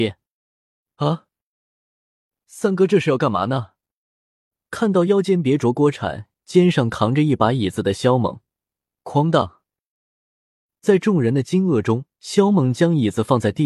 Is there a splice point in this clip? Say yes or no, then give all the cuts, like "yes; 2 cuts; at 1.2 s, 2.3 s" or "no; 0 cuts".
yes; 2 cuts; at 8.9 s, 12.1 s